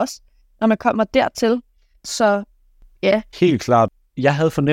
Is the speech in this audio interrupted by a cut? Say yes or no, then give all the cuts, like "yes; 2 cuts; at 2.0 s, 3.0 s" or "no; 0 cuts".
yes; 1 cut; at 3.3 s